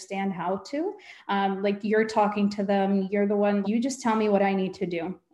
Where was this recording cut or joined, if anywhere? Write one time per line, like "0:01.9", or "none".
0:03.6